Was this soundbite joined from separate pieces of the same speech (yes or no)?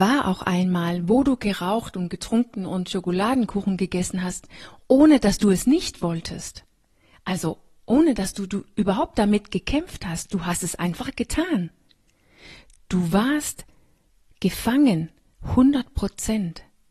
no